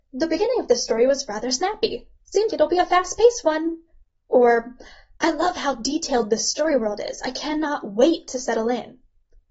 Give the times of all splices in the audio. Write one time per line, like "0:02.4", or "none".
0:02.5